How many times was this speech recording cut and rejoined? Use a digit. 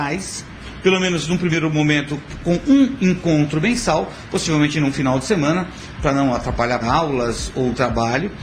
1